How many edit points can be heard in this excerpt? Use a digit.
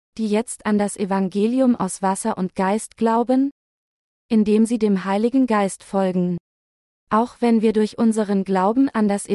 1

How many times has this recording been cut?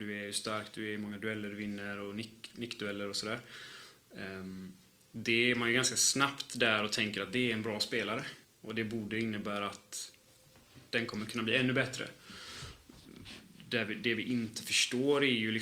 1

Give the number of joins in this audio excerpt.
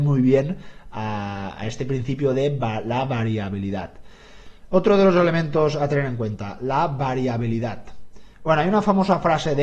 1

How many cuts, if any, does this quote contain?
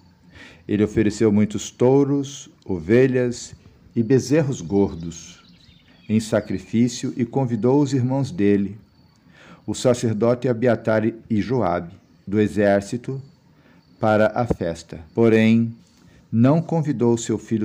2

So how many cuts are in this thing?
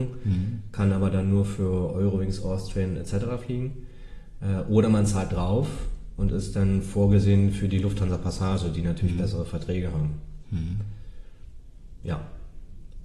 0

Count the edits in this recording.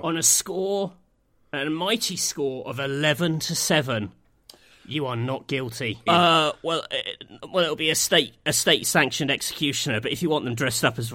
1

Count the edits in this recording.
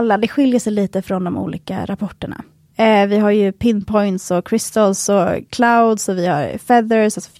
1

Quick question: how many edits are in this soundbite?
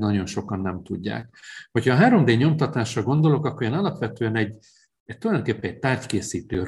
0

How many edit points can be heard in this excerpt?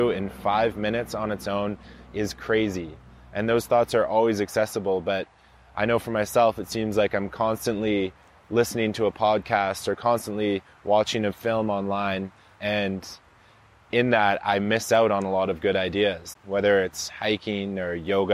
2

